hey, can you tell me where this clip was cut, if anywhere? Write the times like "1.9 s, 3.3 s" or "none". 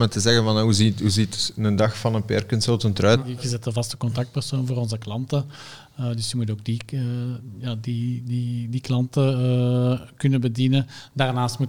3.2 s